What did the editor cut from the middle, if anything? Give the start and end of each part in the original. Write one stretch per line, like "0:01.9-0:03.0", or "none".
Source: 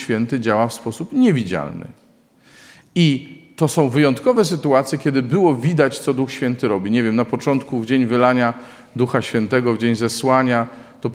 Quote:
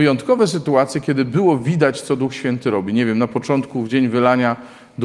none

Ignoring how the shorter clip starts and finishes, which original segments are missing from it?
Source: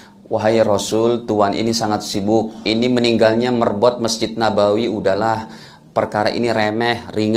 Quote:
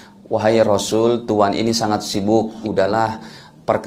0:02.6-0:04.9

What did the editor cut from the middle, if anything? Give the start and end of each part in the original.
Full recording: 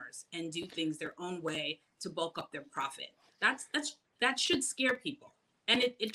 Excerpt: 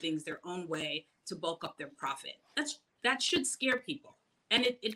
0:03.3-0:03.7

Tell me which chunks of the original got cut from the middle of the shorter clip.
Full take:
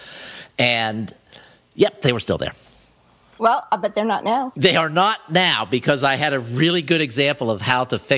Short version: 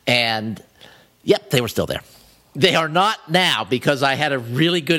0:03.0-0:04.5

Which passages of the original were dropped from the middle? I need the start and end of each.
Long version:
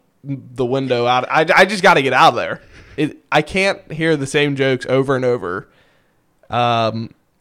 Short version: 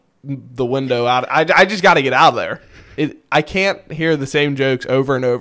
none

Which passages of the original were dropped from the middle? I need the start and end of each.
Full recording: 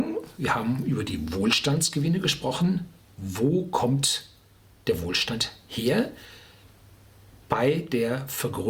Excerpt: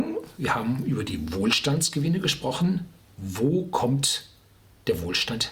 none

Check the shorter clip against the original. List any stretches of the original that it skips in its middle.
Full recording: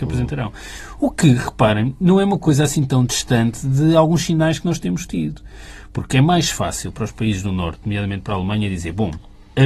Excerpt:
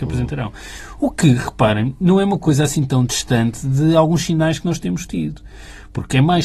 none

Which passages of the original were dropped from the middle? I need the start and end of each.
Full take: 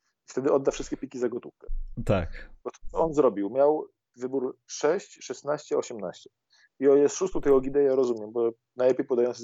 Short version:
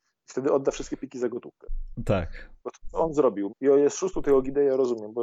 0:03.5-0:06.7

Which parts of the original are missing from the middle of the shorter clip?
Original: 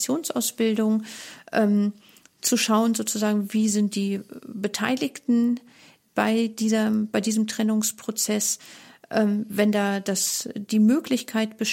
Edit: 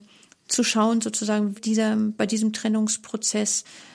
0:03.5-0:06.5

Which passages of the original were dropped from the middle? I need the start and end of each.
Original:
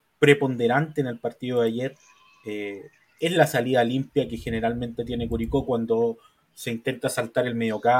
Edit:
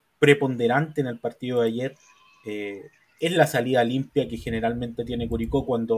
none

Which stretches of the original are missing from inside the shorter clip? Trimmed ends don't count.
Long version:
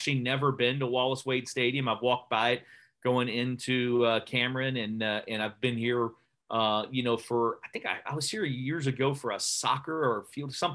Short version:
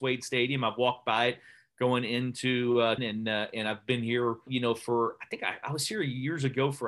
0:04.2-0:04.7
0:06.2-0:06.9

